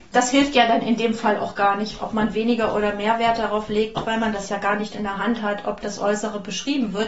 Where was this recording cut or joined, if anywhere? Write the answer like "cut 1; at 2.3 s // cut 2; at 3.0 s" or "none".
none